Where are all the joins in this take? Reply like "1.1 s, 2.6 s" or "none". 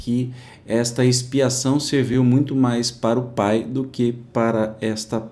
none